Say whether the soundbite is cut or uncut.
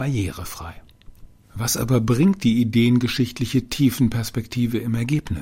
uncut